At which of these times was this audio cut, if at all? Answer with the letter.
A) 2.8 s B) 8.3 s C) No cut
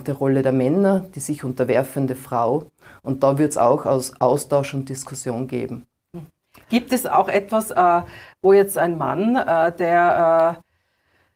C